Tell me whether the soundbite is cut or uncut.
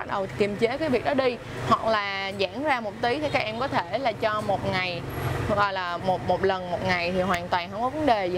cut